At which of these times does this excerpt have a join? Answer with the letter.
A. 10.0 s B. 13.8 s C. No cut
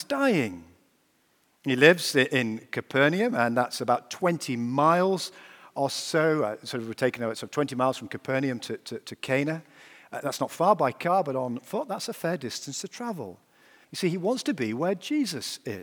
B